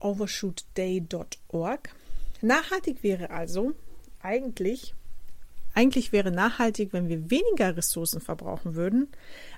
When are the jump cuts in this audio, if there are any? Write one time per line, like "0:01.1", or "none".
0:02.4